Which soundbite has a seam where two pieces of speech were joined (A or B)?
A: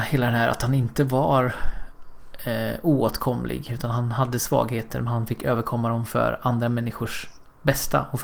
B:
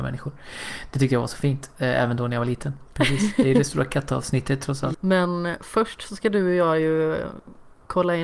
B